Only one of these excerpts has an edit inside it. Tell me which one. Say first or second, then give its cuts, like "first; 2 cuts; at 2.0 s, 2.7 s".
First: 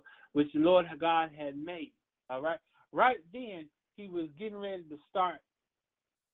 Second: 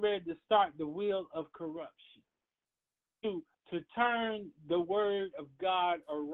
first; 1 cut; at 2.3 s